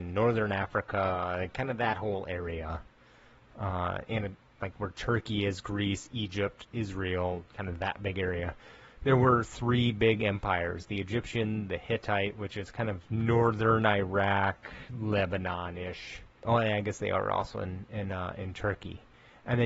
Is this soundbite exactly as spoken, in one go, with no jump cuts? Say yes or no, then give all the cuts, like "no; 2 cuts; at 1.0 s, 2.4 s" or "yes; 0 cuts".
yes; 0 cuts